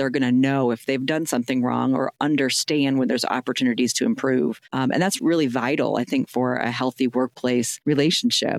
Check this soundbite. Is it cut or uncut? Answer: cut